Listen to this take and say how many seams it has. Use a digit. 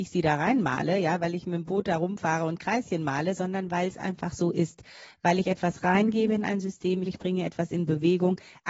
1